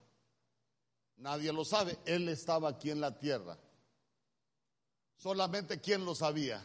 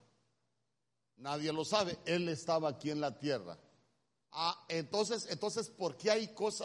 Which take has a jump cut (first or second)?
second